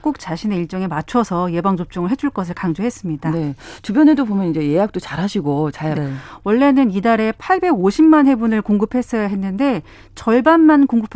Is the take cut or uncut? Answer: cut